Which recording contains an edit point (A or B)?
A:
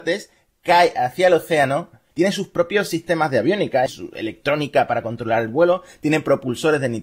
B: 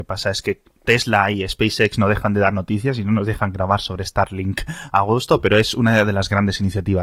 A